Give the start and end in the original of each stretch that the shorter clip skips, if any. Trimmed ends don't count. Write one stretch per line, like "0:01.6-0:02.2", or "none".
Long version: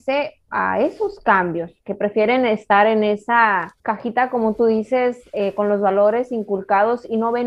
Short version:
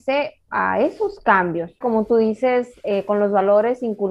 0:01.8-0:04.3